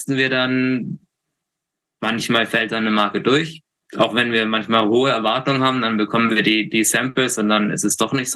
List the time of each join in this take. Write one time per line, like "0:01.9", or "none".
none